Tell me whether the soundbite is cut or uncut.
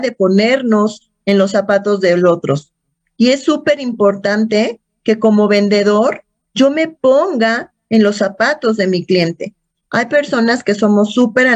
cut